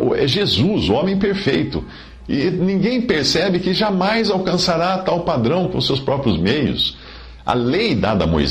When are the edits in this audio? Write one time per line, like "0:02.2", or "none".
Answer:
none